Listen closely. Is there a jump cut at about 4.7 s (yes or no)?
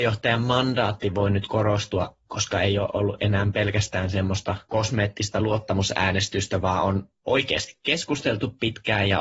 yes